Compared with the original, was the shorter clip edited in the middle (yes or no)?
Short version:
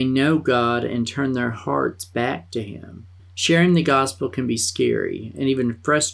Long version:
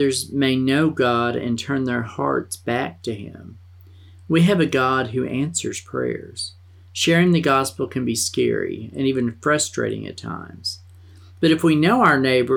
yes